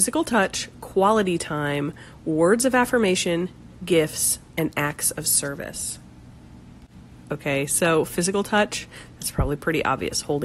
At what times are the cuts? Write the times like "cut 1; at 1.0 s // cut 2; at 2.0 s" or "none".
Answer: cut 1; at 7.2 s